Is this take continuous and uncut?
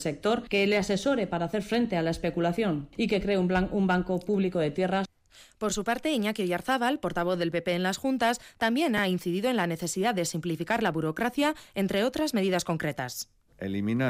yes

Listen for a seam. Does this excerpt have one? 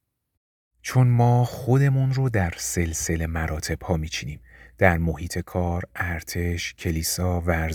no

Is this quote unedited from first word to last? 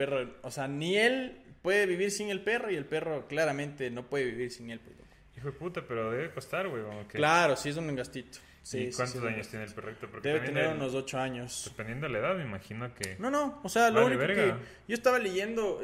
yes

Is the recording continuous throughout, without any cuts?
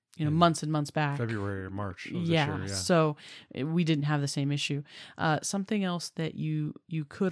yes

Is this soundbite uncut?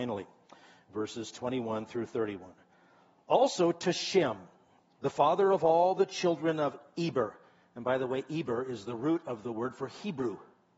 yes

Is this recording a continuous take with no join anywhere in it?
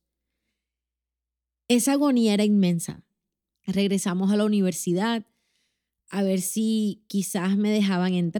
no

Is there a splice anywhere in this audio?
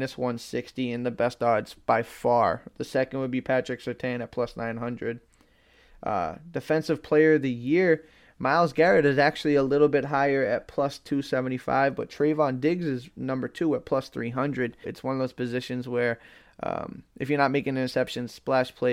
yes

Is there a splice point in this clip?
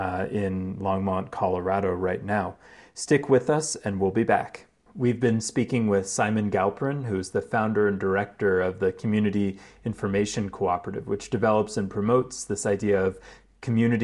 yes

